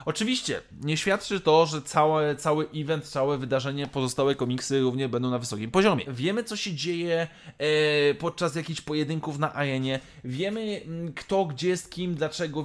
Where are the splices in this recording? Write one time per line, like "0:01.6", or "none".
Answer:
0:06.1